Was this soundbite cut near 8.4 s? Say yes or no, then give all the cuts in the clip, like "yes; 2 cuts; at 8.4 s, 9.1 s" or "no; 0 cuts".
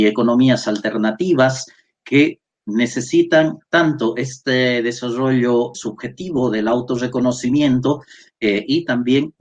no; 1 cut; at 5.7 s